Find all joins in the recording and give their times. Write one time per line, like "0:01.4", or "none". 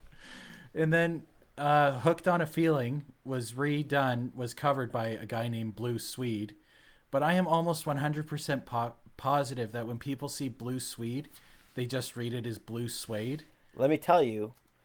none